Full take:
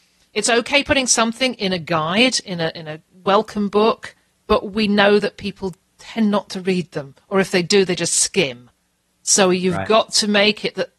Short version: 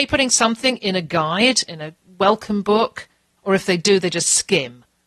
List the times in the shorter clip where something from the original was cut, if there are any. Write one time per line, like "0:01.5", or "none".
0:01.7
0:03.4